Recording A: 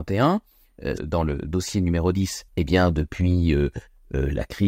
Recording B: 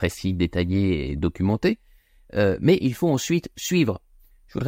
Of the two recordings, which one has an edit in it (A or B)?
A